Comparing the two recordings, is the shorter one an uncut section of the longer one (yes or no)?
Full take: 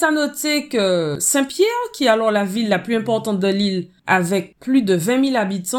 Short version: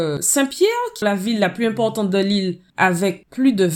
no